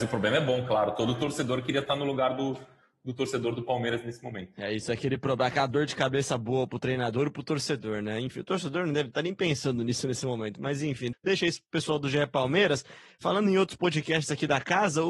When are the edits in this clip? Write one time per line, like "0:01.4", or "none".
0:11.1